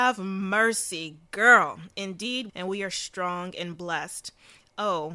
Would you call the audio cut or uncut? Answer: cut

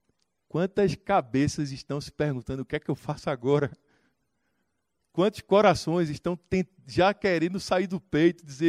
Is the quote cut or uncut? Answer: uncut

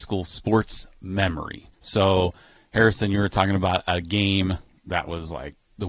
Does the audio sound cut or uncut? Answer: cut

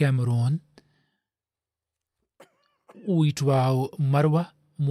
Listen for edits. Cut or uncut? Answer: uncut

